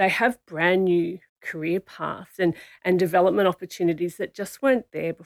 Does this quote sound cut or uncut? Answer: cut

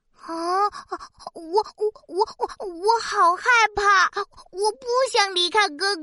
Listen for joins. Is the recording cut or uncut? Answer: uncut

